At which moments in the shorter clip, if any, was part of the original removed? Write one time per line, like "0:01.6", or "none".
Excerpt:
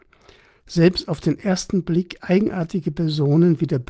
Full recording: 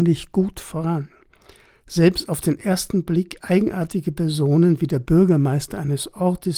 none